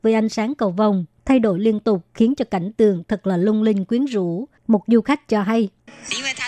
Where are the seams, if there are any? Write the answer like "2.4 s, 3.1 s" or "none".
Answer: 1.2 s, 4.6 s